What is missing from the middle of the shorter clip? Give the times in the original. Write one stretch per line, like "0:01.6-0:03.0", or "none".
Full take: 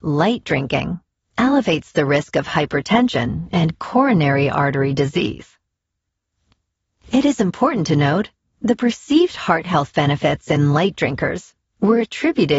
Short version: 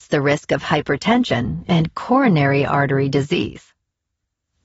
none